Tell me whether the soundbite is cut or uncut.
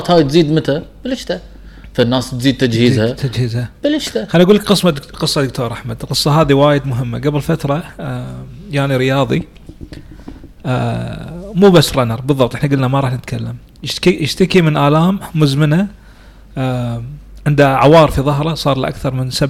uncut